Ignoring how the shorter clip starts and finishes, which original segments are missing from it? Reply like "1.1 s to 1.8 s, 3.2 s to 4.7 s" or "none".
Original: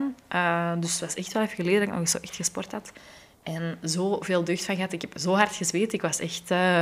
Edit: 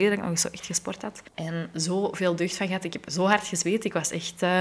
3.0 s to 3.4 s

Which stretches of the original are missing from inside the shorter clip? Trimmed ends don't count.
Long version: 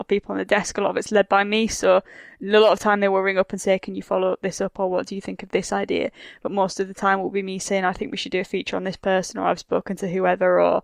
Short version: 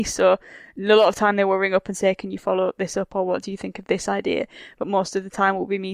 none

